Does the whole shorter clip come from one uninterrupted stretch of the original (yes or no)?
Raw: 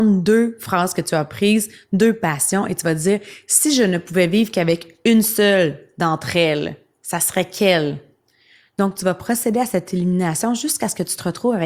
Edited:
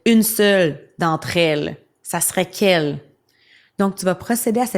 yes